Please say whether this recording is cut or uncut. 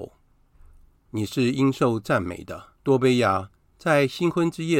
cut